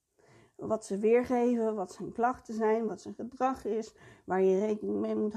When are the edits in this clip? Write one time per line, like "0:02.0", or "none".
none